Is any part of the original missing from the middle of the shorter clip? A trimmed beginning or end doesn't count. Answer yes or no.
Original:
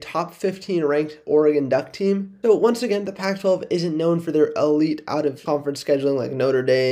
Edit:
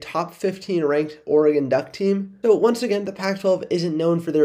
no